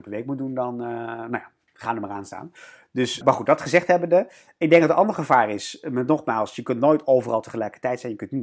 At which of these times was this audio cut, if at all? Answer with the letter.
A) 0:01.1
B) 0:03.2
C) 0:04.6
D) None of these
B